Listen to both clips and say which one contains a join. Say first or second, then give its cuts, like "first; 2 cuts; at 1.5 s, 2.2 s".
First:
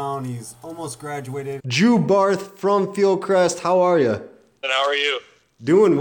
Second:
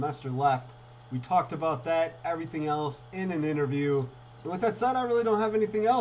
first; 2 cuts; at 1.6 s, 4.6 s